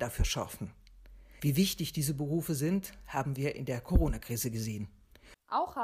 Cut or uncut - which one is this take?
cut